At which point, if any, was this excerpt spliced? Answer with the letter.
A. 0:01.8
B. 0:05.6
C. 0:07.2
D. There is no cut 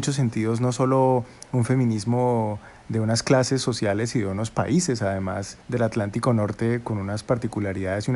B